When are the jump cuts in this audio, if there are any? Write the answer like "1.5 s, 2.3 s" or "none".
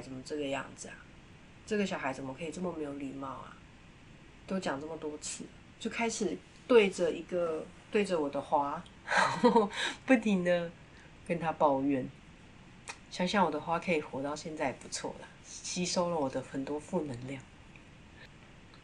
none